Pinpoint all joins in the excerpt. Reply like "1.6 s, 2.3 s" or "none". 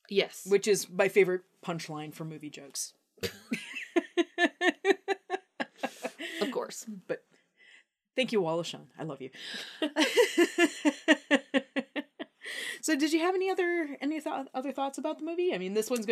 none